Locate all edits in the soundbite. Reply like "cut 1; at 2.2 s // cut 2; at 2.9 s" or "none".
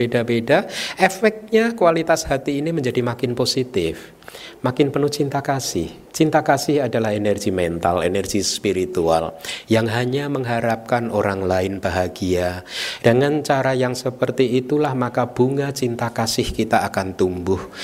cut 1; at 6.0 s // cut 2; at 13.0 s